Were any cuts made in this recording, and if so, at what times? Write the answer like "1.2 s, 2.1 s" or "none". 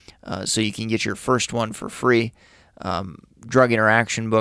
none